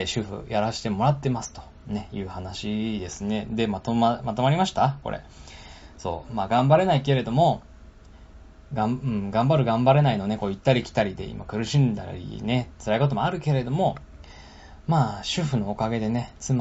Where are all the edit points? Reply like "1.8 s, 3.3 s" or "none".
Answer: none